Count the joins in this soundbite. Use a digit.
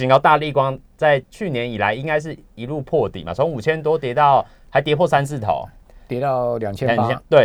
1